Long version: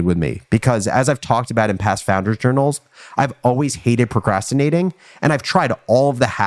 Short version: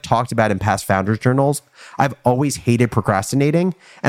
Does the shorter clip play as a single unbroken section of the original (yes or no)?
yes